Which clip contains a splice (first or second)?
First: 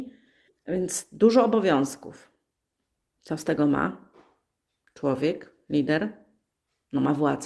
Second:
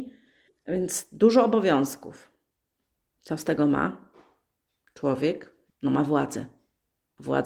second